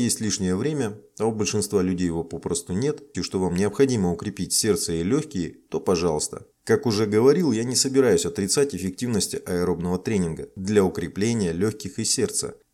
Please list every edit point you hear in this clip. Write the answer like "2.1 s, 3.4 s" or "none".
3.1 s, 6.5 s